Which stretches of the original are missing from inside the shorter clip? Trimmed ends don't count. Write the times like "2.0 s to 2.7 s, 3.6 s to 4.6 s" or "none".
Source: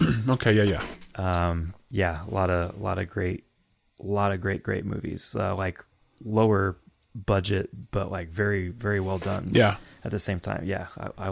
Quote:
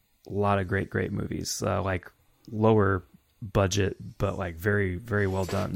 none